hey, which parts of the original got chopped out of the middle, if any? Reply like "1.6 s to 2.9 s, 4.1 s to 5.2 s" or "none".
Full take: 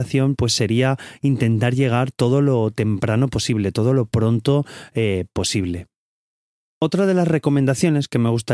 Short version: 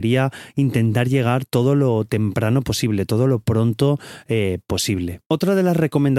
5.9 s to 6.7 s